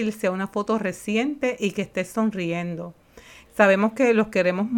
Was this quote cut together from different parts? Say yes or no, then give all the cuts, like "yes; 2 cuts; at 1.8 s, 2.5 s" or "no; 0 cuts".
yes; 1 cut; at 3.5 s